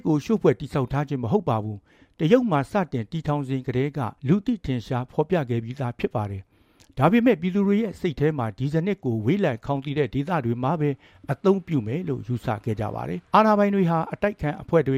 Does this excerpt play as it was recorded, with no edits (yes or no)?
no